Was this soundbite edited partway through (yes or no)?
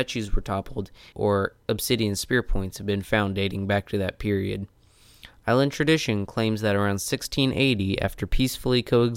yes